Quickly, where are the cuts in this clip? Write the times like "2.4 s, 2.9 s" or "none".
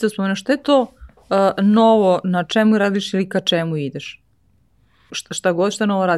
5.1 s